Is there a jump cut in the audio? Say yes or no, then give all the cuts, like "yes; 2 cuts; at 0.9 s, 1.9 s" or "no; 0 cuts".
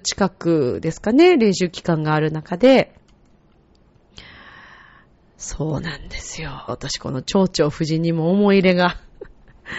yes; 1 cut; at 6.7 s